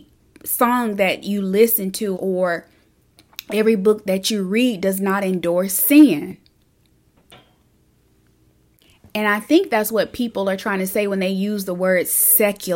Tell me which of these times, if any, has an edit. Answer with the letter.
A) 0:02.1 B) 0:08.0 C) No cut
A